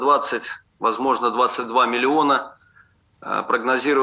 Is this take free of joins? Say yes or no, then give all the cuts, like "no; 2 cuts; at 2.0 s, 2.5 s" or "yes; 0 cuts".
yes; 0 cuts